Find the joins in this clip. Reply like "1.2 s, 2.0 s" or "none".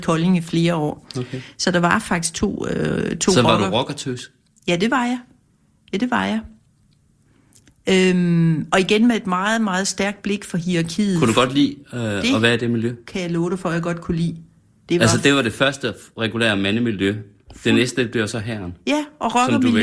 none